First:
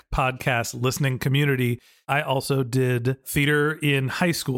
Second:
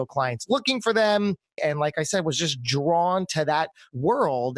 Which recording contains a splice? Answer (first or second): second